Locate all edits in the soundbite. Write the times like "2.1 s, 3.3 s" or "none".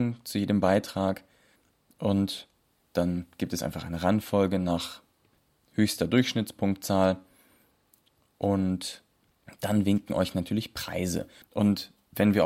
11.4 s